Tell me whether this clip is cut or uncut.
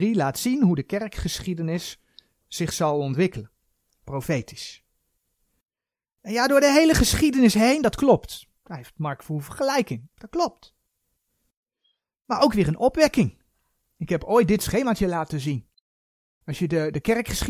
cut